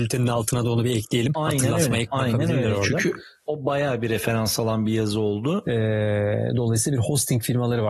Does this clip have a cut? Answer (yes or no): yes